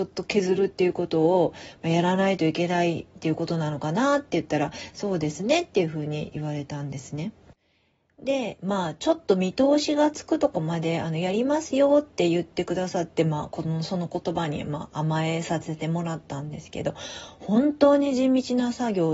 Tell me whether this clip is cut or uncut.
uncut